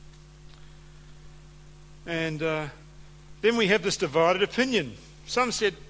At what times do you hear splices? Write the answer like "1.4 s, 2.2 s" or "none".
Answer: none